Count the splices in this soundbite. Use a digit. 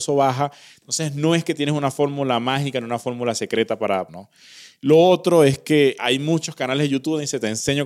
2